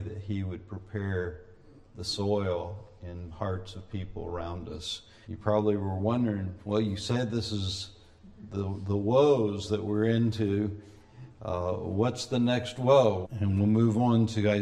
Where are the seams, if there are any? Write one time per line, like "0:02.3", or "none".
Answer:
0:05.2
0:13.2